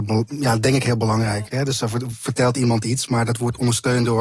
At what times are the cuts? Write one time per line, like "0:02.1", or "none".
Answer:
0:01.5